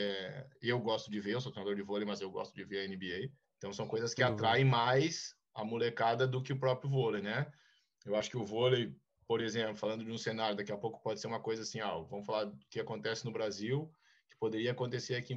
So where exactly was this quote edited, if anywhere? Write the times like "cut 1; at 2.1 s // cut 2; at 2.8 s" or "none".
cut 1; at 3.4 s